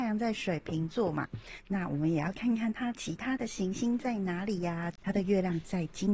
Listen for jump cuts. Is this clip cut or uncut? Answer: uncut